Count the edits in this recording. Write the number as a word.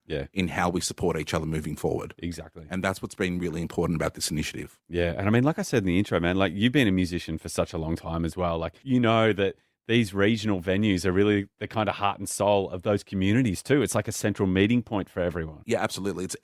zero